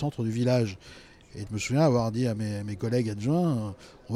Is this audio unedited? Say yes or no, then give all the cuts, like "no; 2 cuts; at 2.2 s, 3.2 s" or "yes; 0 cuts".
no; 1 cut; at 1.5 s